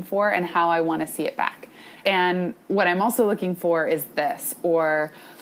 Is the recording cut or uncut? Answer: cut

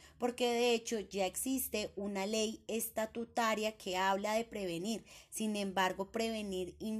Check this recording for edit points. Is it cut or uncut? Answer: uncut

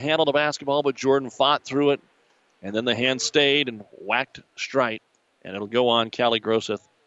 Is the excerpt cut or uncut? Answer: uncut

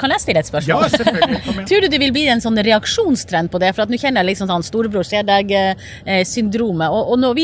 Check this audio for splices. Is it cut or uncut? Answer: uncut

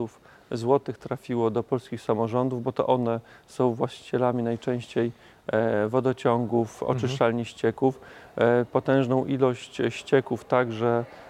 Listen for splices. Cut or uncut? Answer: uncut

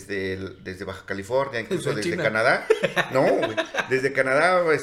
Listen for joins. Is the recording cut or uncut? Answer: uncut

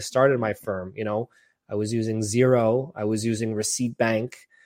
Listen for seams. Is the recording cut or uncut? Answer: uncut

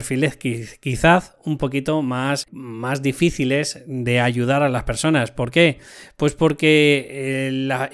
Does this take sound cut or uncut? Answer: uncut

